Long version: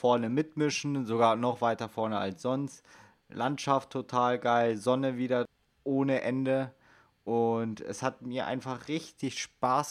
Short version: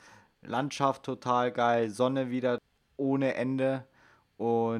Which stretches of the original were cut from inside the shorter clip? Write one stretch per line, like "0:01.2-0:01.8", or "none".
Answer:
none